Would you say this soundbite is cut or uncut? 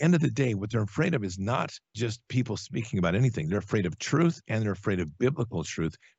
cut